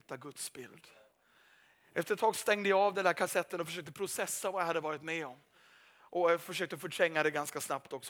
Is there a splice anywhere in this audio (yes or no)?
no